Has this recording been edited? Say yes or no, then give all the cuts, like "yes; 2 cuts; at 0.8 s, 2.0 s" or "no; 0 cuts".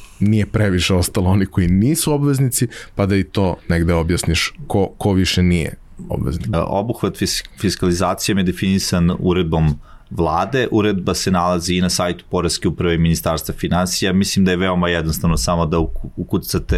yes; 1 cut; at 6.5 s